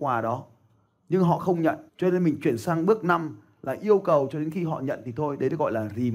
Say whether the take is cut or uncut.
cut